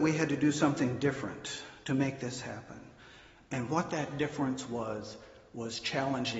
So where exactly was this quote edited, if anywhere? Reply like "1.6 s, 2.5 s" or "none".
none